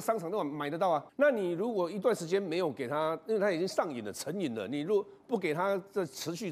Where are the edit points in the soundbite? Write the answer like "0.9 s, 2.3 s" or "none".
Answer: 1.1 s